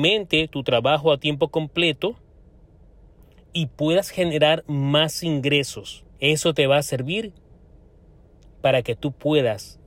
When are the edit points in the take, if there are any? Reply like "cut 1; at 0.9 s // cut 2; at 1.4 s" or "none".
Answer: cut 1; at 6.1 s

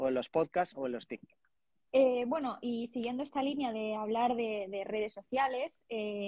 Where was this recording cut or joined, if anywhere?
cut 1; at 1.9 s

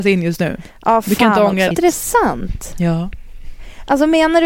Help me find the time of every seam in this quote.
cut 1; at 1.7 s

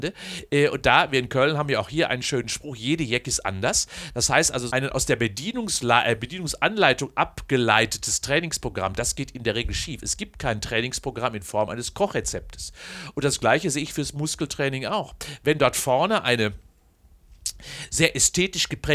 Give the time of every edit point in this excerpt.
cut 1; at 4.7 s

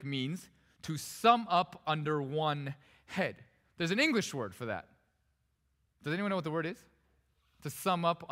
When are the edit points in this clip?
none

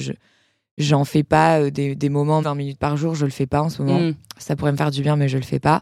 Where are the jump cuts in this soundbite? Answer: cut 1; at 2.4 s

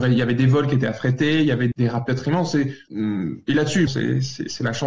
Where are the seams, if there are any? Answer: cut 1; at 1.7 s // cut 2; at 3.9 s

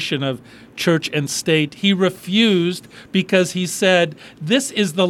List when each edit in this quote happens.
none

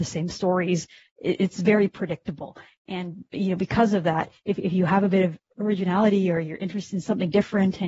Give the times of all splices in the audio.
none

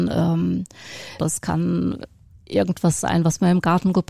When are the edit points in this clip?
cut 1; at 1.2 s

